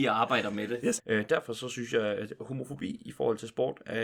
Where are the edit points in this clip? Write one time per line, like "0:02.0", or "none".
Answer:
0:01.0